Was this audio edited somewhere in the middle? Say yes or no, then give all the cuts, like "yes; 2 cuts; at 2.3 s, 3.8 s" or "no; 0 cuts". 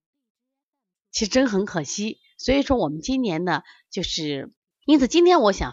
yes; 1 cut; at 4.8 s